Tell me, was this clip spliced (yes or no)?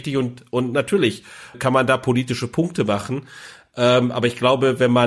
yes